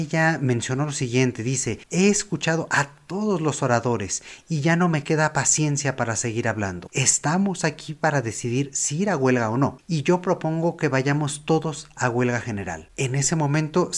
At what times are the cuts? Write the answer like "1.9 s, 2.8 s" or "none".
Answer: 6.9 s